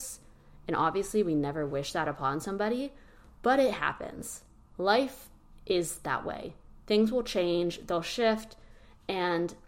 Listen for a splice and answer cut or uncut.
uncut